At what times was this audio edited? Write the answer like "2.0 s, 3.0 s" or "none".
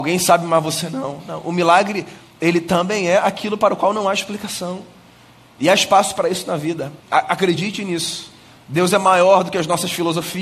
7.0 s